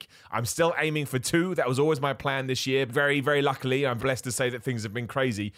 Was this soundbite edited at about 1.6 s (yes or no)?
no